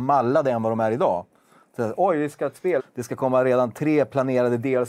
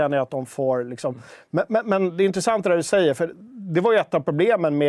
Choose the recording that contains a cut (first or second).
first